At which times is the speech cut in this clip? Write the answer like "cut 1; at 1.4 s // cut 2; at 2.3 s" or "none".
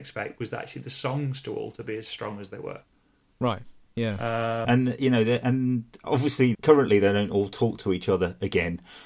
cut 1; at 4.6 s // cut 2; at 6.5 s